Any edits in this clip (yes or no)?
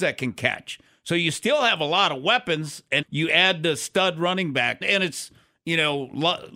yes